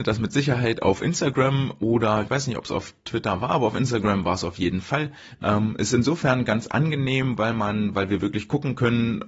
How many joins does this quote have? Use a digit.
1